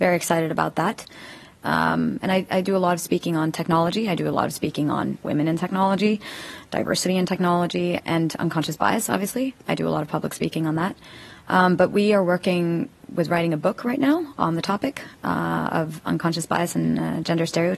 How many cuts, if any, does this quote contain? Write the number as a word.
two